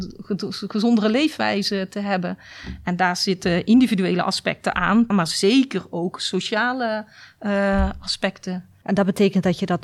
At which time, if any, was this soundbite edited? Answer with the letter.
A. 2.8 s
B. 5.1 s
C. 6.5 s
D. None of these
B